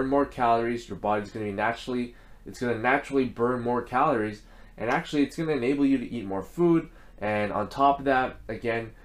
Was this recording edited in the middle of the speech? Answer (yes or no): no